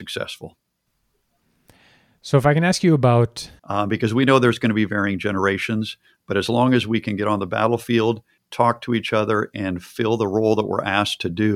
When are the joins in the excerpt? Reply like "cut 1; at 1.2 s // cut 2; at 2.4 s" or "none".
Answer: cut 1; at 3.6 s // cut 2; at 8.4 s